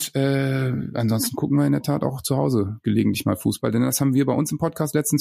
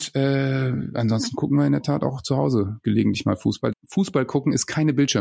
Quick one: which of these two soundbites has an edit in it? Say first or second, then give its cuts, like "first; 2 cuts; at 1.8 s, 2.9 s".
second; 1 cut; at 3.7 s